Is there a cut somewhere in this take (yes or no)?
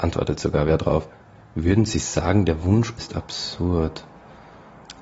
yes